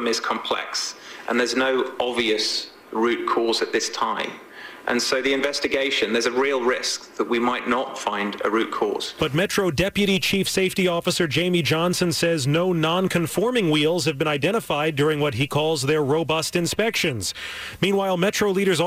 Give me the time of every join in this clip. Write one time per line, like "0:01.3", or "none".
none